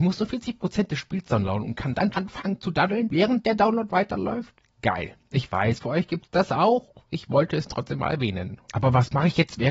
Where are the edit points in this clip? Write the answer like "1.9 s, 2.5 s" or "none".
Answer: 2.1 s, 5.8 s, 8.6 s

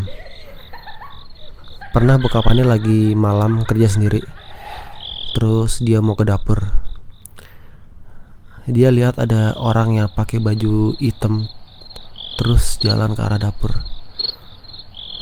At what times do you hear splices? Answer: none

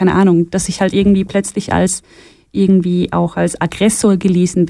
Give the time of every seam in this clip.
none

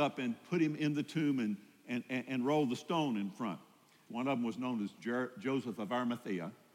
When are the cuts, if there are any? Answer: 4.1 s

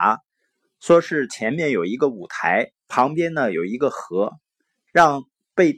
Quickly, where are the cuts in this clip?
none

